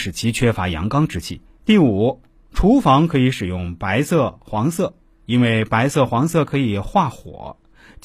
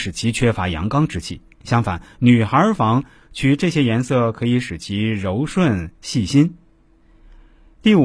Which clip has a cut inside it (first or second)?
first